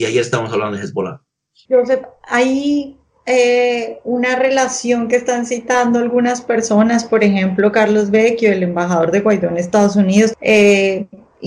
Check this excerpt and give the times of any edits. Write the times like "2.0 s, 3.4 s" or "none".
1.7 s, 10.3 s